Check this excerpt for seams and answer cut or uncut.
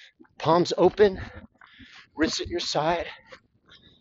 uncut